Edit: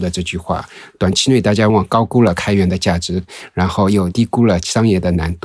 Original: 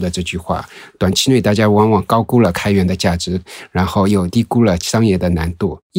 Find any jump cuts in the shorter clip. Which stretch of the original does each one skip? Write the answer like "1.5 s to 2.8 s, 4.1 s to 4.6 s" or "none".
1.7 s to 1.9 s